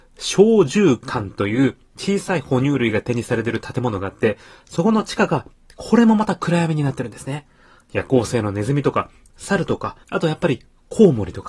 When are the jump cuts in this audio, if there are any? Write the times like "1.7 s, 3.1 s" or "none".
10.0 s